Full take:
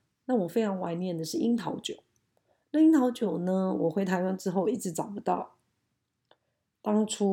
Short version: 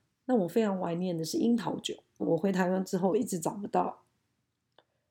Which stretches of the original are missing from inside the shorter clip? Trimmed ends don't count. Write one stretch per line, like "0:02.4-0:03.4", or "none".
0:02.2-0:03.7